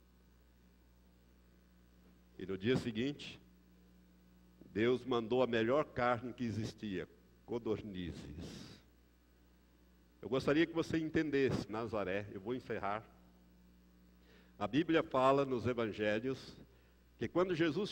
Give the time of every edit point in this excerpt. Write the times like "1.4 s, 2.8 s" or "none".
10.1 s, 11.7 s